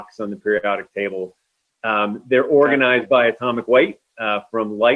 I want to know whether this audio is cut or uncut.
uncut